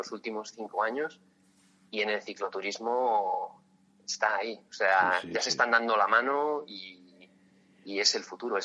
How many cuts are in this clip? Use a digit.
0